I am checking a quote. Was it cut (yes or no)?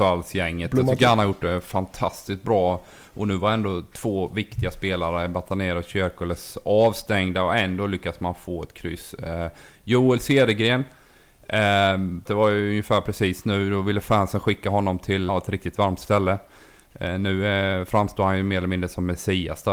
yes